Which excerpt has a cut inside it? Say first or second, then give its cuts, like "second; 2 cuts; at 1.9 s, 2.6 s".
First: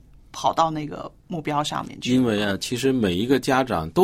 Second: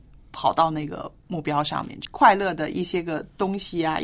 second; 1 cut; at 2.0 s